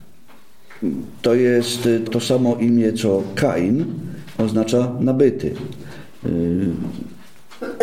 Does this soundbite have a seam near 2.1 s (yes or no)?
yes